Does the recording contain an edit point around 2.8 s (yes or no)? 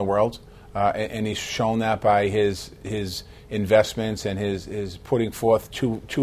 yes